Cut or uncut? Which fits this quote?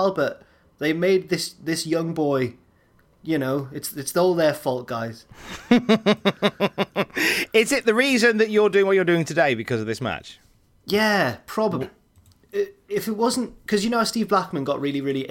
cut